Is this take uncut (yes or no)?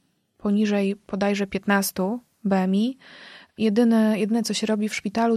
yes